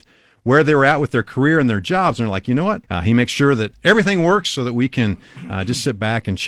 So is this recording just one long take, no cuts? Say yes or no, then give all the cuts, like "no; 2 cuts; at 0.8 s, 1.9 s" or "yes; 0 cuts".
no; 1 cut; at 2.8 s